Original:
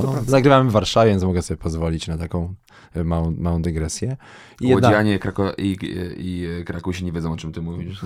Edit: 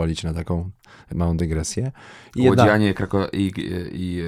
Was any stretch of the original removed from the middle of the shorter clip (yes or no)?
yes